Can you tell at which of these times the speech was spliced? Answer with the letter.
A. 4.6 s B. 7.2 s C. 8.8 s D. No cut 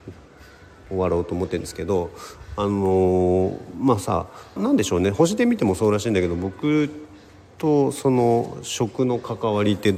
A